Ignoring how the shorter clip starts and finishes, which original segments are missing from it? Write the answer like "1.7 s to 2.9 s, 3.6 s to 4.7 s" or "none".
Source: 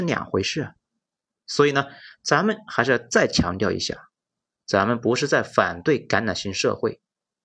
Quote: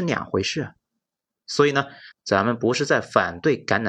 2.1 s to 4.5 s